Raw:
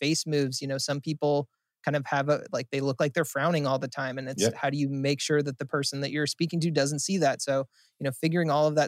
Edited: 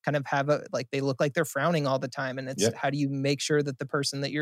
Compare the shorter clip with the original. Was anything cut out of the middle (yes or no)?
no